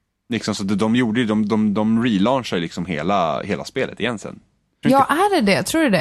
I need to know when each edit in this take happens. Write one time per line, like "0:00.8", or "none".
0:04.8